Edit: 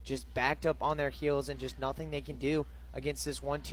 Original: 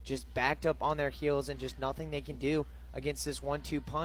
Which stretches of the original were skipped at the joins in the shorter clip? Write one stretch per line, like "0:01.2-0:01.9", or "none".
none